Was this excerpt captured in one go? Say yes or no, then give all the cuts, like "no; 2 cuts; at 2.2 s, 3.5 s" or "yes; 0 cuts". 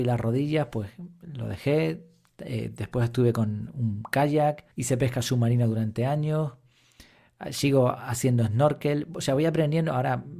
no; 1 cut; at 4.7 s